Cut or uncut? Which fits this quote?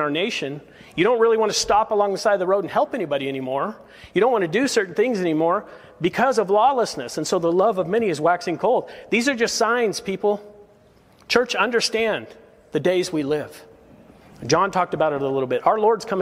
uncut